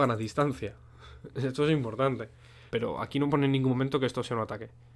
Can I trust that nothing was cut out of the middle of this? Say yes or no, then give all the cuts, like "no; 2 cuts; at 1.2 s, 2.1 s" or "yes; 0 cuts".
no; 1 cut; at 2.7 s